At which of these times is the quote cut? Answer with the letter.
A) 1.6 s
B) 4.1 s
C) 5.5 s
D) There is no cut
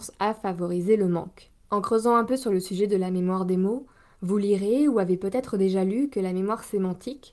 A